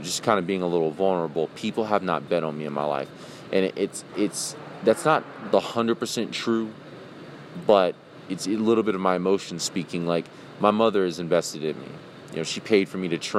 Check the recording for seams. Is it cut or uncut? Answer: uncut